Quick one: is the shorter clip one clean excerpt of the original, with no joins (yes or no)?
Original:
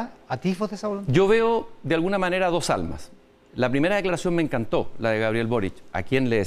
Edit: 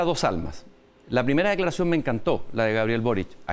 yes